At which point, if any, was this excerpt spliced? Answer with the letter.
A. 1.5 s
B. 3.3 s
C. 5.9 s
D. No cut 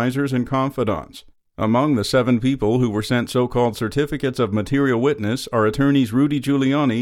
D